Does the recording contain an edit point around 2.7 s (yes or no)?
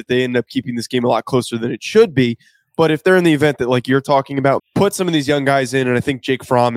no